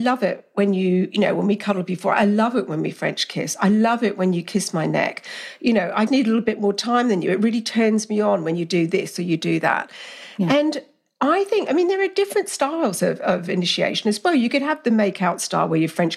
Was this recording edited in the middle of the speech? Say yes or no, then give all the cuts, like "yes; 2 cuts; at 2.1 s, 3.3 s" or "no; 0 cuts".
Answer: yes; 1 cut; at 6.1 s